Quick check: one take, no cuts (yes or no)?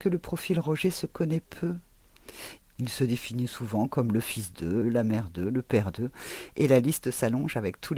no